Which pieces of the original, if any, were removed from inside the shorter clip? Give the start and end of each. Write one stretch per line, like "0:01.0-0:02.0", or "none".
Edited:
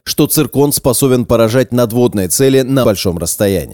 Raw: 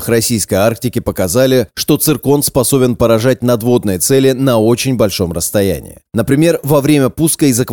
0:04.5-0:05.0